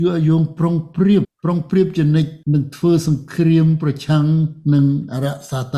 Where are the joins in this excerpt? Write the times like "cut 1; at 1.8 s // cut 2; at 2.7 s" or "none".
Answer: cut 1; at 1.2 s // cut 2; at 2.4 s